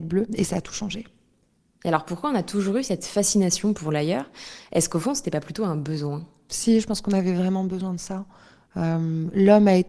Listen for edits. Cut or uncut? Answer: uncut